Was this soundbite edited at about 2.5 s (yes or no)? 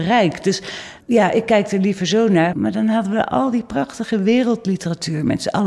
yes